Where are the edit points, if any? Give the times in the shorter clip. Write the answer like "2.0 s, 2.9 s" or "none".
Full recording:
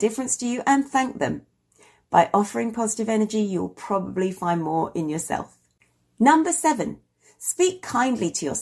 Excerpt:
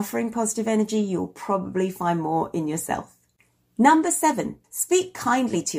4.6 s